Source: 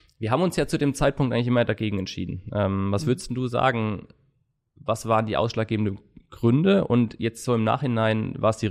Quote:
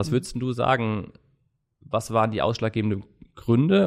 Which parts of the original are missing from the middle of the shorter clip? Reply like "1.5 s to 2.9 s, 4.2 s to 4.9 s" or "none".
none

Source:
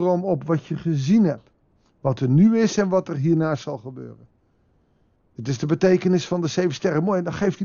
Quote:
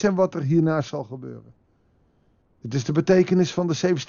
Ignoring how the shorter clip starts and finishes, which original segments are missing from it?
none

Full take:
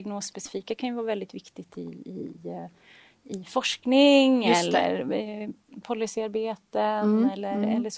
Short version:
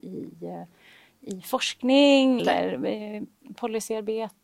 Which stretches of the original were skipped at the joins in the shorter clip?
4.4 s to 4.7 s

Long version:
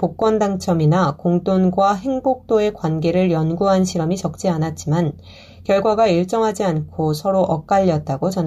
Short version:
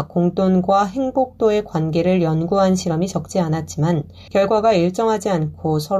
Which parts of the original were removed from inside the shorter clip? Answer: 5.4 s to 5.6 s

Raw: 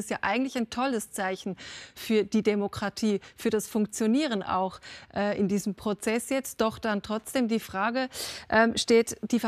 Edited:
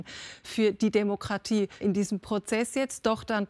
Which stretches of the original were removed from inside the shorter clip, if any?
3.3 s to 5.4 s

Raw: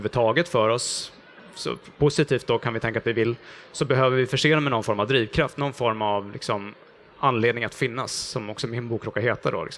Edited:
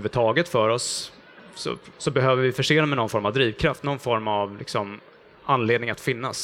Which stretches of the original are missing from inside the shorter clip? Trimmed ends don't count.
1.9 s to 3.7 s

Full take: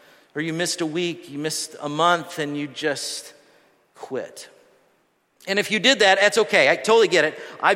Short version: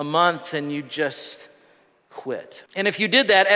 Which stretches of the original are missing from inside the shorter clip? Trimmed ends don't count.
4.5 s to 5.4 s

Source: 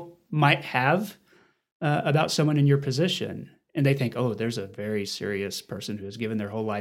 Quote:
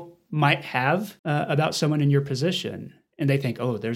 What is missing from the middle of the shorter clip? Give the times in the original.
1.2 s to 1.8 s

